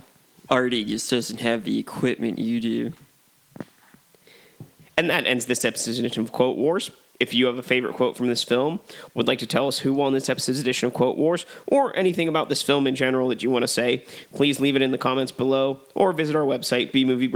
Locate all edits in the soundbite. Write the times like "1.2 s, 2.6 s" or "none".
none